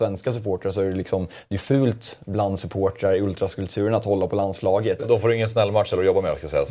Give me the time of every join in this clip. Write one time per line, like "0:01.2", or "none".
0:05.0